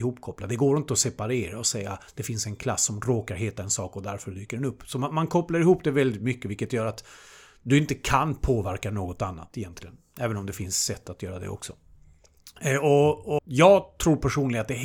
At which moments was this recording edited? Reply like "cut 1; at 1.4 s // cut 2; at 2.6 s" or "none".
cut 1; at 13.4 s